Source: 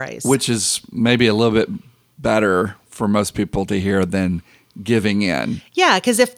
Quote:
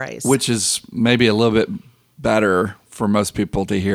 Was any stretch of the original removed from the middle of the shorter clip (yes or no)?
no